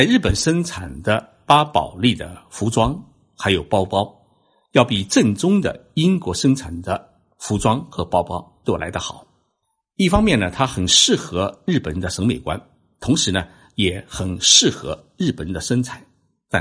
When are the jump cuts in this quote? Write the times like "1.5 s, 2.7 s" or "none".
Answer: none

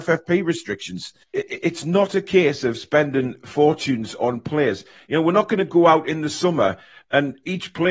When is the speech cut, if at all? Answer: 1.2 s

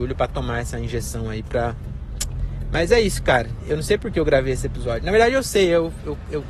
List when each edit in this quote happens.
none

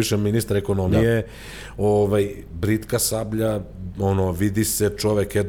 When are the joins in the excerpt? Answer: none

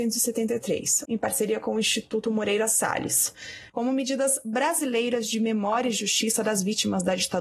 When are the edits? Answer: 1.1 s, 3.7 s

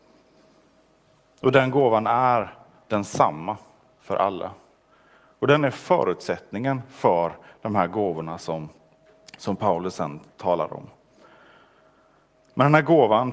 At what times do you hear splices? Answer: none

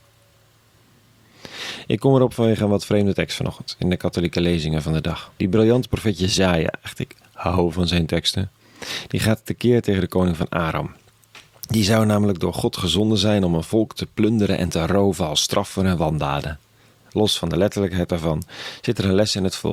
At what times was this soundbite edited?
5.4 s

